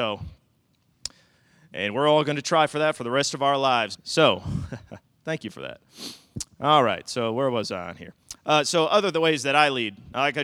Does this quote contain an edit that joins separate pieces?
yes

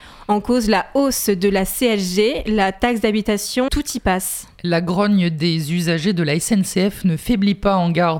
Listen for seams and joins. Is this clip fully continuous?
no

